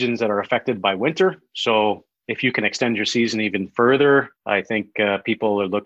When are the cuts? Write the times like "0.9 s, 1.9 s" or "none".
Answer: 4.4 s